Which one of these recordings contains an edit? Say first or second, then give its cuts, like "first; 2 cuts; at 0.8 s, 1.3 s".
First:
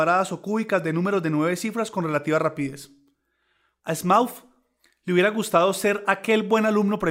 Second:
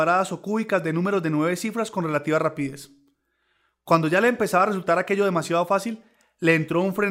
first; 1 cut; at 3.8 s